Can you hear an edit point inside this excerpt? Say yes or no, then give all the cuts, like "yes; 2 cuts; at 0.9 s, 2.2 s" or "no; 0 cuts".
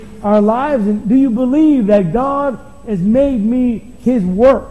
no; 0 cuts